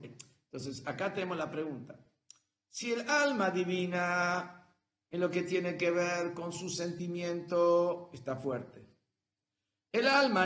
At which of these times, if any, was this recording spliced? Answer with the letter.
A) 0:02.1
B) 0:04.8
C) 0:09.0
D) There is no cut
D